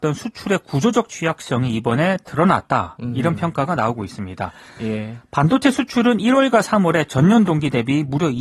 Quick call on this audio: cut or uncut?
uncut